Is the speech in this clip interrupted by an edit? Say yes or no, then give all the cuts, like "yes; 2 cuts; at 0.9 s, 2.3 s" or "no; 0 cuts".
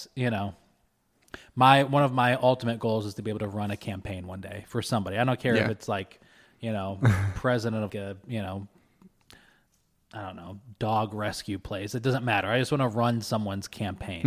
yes; 1 cut; at 7.9 s